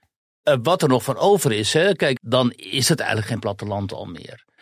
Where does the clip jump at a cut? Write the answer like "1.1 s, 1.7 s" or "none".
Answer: 2.2 s